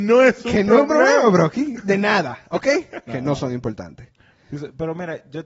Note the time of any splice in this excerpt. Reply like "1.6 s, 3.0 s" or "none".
3.1 s

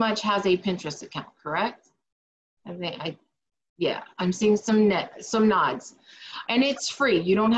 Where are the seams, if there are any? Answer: 4.1 s, 6.4 s

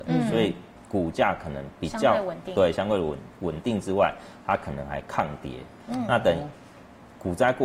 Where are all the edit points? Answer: none

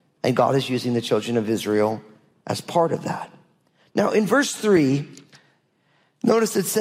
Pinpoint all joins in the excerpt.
none

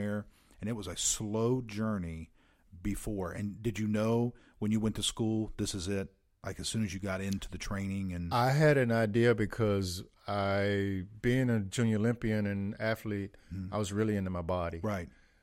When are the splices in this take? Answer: none

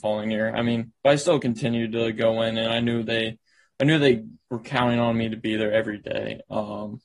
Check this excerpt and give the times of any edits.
none

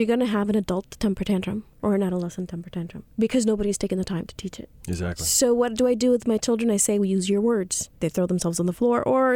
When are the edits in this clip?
8.0 s

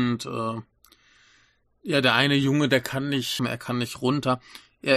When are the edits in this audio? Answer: 3.4 s

